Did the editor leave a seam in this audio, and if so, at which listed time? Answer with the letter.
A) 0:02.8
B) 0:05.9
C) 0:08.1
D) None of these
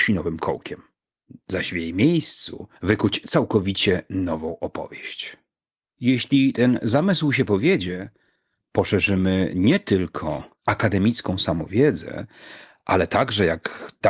A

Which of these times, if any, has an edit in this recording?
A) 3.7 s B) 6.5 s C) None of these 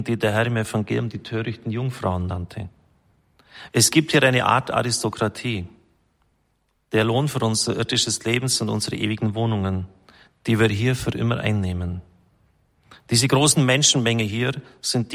A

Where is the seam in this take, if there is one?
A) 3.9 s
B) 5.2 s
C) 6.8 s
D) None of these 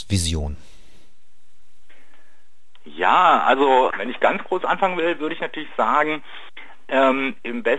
A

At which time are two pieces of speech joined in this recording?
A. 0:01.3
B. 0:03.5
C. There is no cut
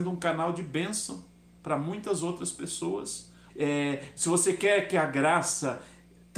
B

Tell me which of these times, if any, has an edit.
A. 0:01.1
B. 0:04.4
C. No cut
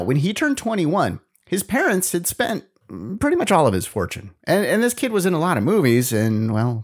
C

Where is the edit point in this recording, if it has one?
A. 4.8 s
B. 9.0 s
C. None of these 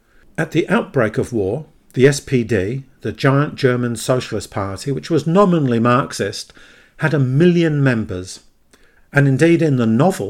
B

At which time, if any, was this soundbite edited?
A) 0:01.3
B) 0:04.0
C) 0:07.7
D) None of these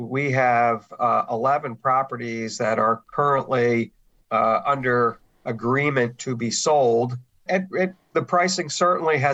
D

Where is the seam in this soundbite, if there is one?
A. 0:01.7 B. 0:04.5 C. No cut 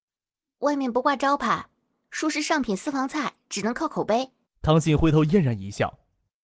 B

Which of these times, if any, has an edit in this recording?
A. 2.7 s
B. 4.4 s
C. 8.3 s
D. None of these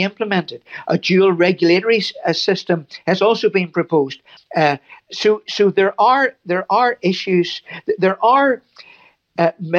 B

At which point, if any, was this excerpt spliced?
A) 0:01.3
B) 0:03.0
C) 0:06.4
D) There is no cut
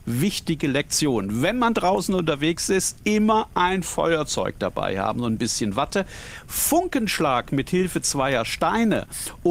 D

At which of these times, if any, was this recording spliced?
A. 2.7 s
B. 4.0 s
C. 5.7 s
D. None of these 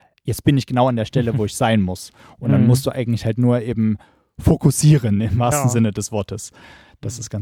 D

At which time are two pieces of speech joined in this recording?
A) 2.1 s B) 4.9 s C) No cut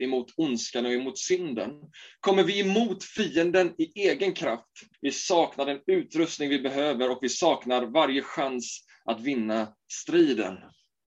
B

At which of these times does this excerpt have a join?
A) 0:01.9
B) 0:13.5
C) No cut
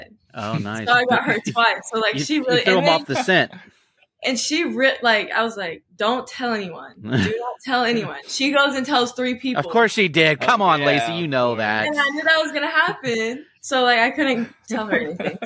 B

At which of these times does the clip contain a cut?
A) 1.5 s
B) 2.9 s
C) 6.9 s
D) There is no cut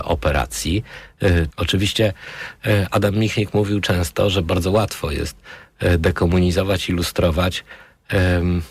A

